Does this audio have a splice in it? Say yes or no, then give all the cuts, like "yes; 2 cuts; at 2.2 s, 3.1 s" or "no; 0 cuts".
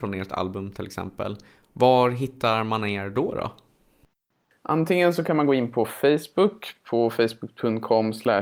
no; 0 cuts